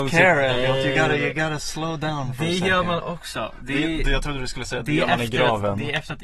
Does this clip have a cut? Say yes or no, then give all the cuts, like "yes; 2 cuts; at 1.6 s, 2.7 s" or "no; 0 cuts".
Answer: no; 0 cuts